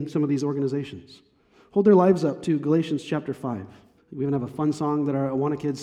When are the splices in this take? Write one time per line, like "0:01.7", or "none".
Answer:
0:04.0

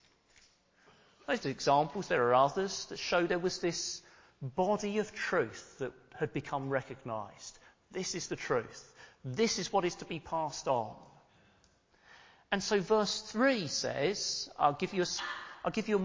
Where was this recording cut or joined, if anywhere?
0:01.4

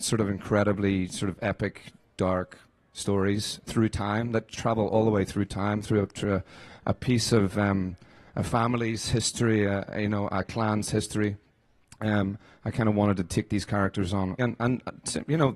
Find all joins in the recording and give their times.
0:14.4

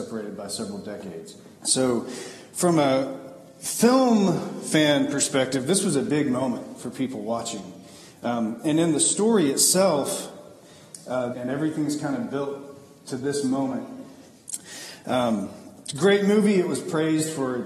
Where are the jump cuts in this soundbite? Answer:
0:01.6
0:11.3
0:14.3

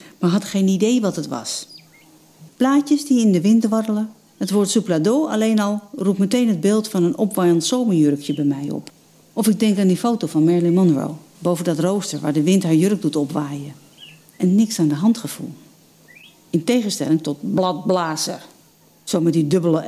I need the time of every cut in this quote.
0:02.5

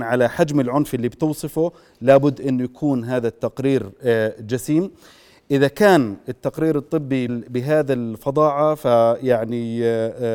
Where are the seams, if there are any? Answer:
0:07.3

